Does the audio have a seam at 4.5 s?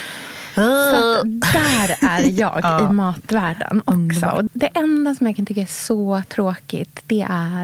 yes; 1 cut; at 4.5 s

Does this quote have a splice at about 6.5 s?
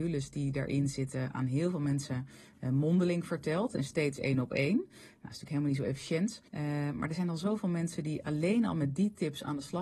yes; 1 cut; at 6.5 s

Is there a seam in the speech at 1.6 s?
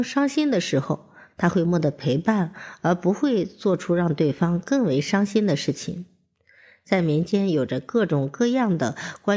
yes; 1 cut; at 1.6 s

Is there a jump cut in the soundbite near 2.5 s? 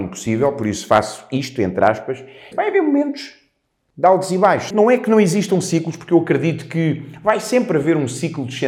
yes; 2 cuts; at 2.5 s, 4.7 s

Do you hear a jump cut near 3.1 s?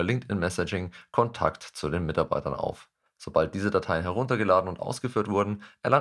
yes; 1 cut; at 3.1 s

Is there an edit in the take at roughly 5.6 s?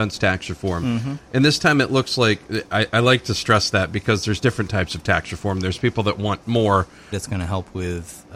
no; 1 cut; at 7.1 s

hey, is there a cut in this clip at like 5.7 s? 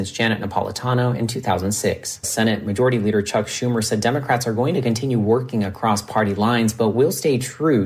no; 1 cut; at 2.2 s

